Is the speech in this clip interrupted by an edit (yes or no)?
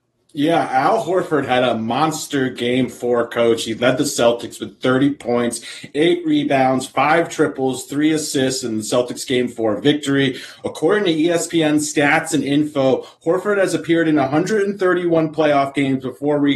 no